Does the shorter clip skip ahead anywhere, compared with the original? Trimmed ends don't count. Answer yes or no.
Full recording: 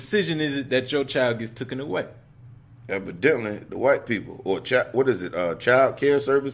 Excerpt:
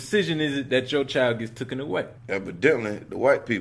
yes